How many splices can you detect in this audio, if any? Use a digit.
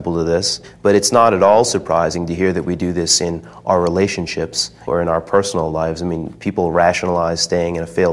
1